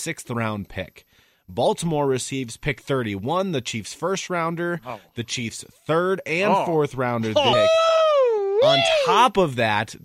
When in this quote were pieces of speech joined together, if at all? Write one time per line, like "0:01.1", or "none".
0:07.5